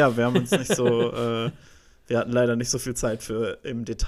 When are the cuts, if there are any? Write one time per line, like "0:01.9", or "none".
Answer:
none